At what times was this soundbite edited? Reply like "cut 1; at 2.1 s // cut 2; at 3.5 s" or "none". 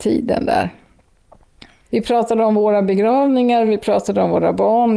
none